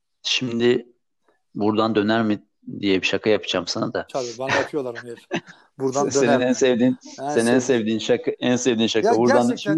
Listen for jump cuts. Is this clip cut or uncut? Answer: uncut